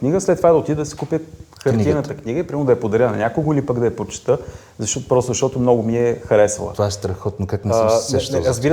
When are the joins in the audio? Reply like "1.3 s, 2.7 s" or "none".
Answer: none